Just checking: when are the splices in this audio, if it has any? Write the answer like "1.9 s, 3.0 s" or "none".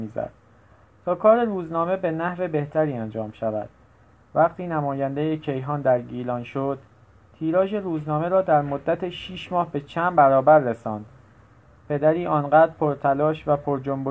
none